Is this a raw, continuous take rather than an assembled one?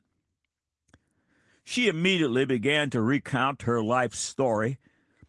no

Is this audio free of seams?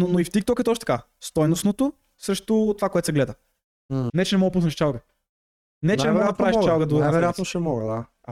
no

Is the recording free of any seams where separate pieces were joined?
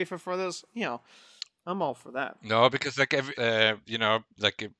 no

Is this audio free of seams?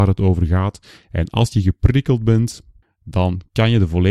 no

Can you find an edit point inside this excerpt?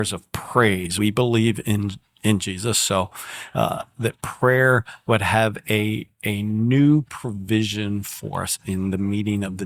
yes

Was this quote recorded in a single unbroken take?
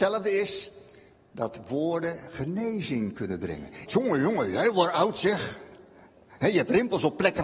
no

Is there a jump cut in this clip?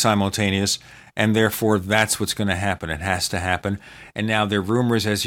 no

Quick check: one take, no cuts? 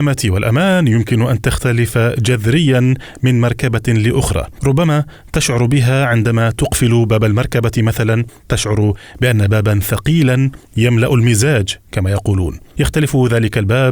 yes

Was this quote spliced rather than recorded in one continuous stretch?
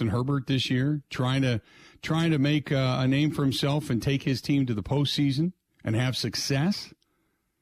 no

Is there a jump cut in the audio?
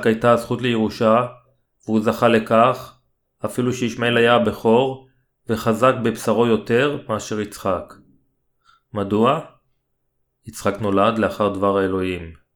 no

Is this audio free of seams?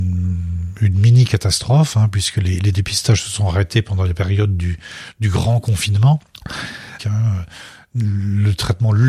no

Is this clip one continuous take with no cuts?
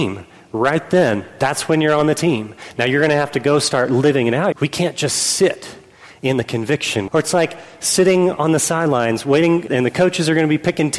no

